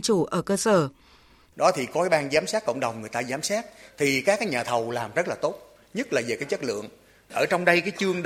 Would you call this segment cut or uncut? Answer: cut